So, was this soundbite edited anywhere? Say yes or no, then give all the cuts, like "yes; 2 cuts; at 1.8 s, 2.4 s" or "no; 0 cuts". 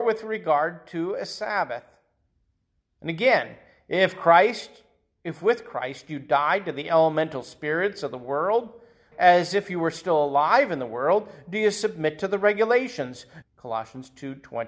yes; 2 cuts; at 9.1 s, 13.4 s